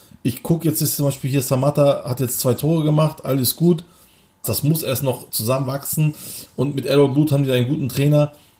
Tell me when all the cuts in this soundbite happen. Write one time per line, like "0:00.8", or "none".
0:04.4